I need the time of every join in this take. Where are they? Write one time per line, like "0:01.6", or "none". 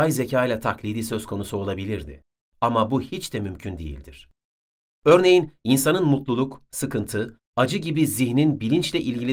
none